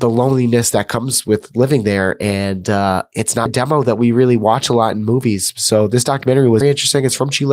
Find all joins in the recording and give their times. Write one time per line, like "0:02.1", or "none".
0:03.5
0:06.6